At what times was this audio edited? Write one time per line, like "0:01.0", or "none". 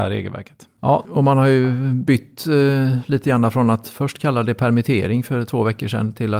none